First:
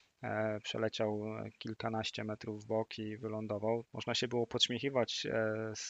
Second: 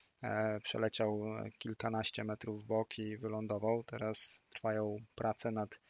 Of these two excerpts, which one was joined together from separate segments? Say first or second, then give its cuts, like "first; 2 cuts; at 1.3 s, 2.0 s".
first; 1 cut; at 3.9 s